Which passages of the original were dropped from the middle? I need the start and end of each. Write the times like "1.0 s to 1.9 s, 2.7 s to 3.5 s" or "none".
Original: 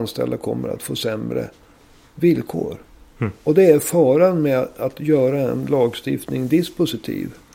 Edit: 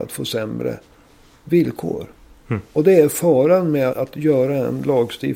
4.6 s to 4.7 s